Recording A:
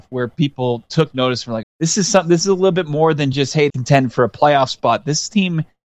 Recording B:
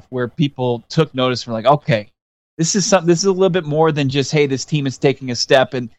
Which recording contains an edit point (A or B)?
A